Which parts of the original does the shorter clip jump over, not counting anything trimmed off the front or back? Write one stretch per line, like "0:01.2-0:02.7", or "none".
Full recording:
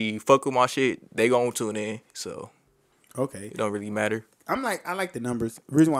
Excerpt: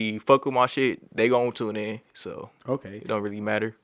0:02.6-0:03.1

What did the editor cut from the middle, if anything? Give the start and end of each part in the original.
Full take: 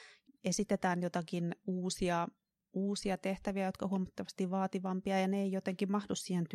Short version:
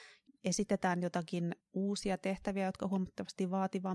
0:01.6-0:02.6

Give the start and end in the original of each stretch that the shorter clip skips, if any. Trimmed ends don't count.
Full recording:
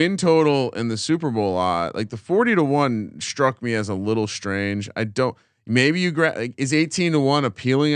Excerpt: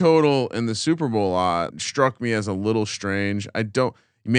0:01.9-0:03.1

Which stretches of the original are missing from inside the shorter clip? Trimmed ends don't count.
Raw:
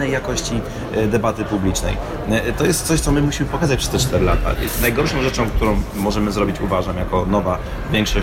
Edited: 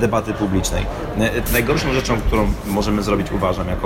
0:02.6-0:04.8

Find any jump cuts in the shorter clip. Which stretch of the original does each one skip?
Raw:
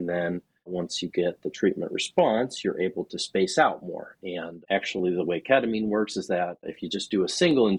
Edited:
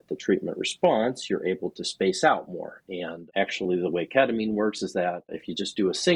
none

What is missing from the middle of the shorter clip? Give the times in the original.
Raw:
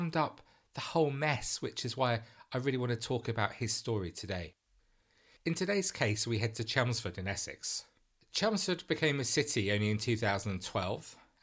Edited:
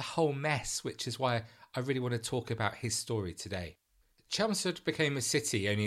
0:04.9-0:08.1

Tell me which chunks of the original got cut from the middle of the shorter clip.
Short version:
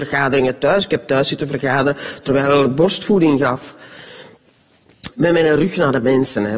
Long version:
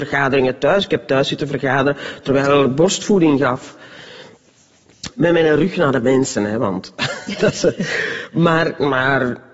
none

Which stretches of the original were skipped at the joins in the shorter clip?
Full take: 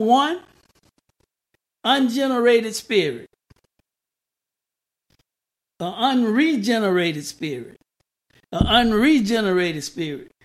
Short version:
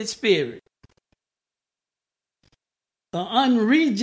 none

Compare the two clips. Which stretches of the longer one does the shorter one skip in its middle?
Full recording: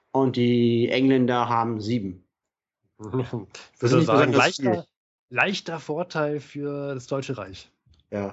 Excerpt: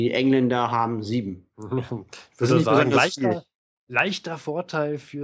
0:02.3-0:02.9

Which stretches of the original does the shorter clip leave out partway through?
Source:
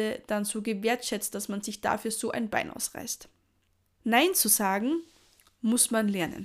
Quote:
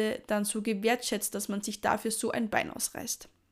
none

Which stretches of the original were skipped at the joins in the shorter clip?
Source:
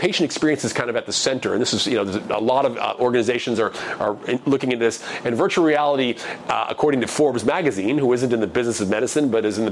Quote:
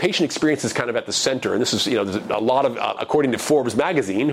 0:03.0-0:06.7

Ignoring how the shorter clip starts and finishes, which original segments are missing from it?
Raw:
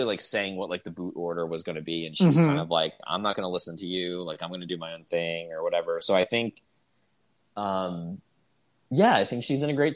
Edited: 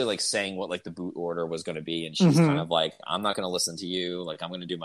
none

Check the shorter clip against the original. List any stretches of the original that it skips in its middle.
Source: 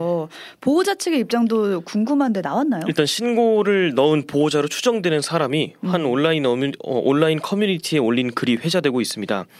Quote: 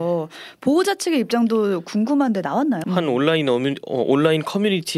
0:02.8-0:05.8

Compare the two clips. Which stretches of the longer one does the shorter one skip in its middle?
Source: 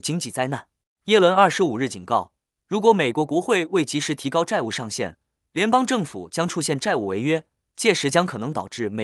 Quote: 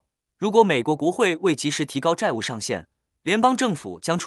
none

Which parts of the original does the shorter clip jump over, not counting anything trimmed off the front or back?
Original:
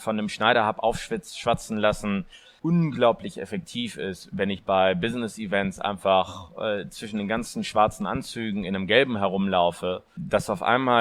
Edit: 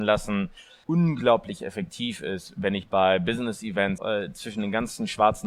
0:05.7-0:06.5

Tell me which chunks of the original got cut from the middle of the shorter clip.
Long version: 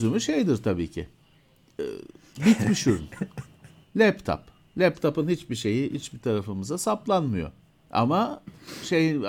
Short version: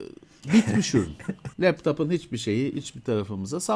0:03.5-0:04.7

